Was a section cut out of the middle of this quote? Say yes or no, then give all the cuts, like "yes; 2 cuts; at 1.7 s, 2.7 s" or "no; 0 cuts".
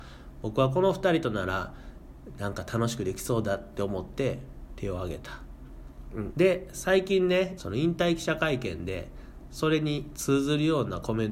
yes; 2 cuts; at 6.3 s, 7.6 s